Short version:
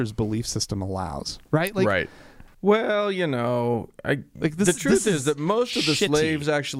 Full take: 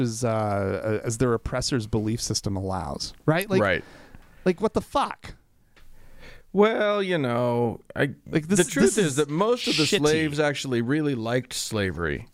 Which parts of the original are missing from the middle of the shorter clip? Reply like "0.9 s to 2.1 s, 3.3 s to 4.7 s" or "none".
4.3 s to 6.5 s